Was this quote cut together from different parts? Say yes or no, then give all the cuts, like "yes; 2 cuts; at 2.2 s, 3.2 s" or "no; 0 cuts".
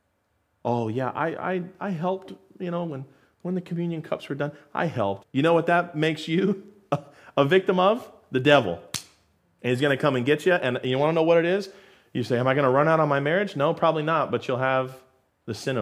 yes; 1 cut; at 5.2 s